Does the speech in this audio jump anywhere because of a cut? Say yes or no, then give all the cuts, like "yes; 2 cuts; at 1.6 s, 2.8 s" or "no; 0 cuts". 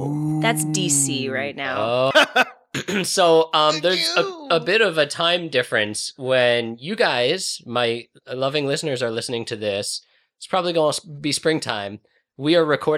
yes; 1 cut; at 2.1 s